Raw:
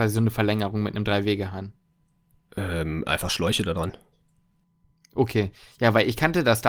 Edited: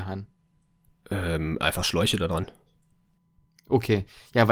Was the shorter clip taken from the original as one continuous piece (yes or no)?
yes